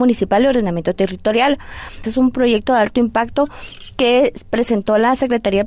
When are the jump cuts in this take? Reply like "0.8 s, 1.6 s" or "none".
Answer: 2.0 s